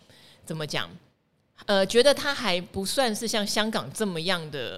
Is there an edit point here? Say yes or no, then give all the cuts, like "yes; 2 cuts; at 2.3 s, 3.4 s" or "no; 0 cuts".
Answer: no; 0 cuts